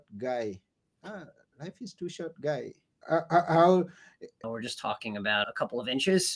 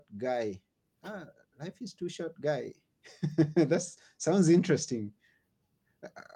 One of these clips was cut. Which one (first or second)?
first